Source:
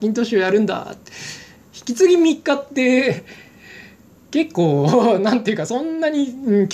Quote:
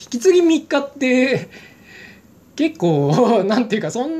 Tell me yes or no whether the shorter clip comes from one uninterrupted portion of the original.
yes